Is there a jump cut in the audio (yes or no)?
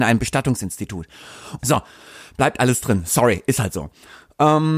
yes